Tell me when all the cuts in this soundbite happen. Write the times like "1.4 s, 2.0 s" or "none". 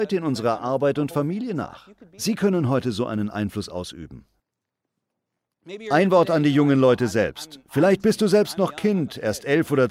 none